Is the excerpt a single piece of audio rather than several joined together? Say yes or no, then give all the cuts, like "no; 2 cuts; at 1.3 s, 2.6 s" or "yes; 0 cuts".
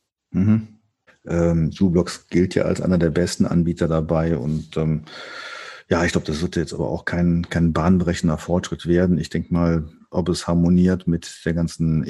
no; 2 cuts; at 1.1 s, 10.1 s